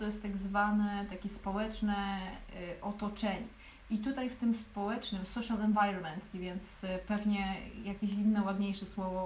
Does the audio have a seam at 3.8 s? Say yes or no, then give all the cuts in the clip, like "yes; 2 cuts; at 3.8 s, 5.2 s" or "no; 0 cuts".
no; 1 cut; at 6.3 s